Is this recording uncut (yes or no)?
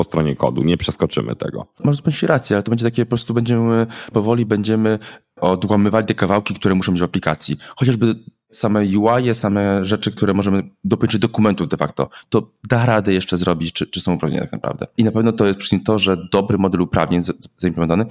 no